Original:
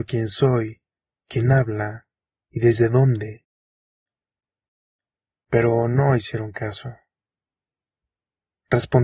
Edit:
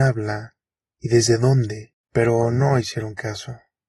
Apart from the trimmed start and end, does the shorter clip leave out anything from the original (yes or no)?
yes